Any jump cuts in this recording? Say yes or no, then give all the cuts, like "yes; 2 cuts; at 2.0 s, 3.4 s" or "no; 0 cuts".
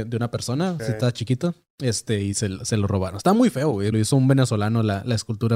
yes; 1 cut; at 3.9 s